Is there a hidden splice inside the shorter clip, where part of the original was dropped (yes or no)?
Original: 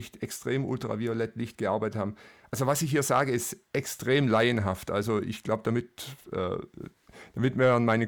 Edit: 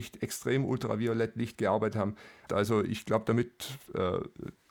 yes